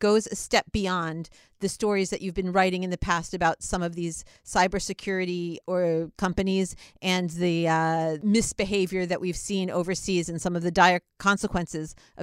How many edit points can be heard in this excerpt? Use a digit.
0